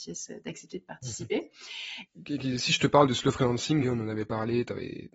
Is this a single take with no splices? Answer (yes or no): no